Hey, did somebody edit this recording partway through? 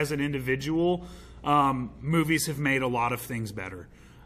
no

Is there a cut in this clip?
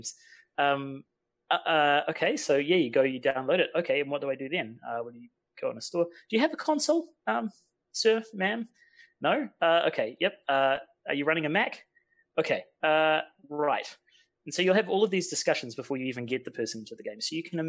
no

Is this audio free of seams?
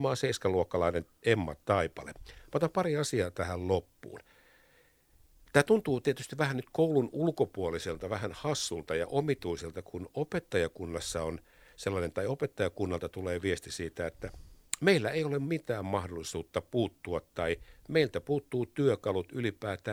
yes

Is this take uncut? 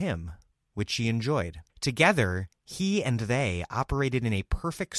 no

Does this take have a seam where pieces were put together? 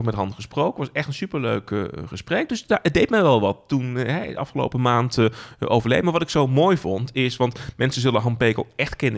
no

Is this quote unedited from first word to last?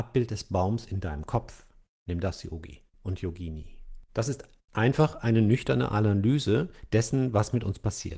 no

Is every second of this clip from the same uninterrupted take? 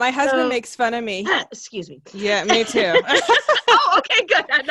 no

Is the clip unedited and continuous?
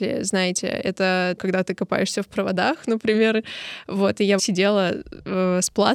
no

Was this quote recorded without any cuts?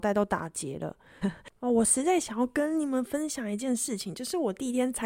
no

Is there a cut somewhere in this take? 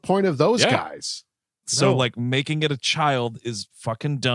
yes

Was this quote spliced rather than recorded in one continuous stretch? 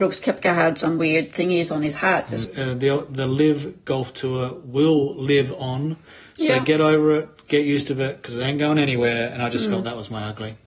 yes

